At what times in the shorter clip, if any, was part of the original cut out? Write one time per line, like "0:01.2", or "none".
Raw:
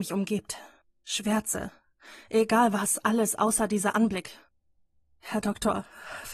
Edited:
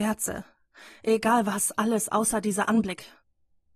none